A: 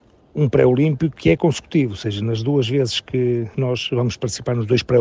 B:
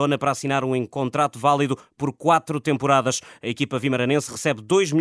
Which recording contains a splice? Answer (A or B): A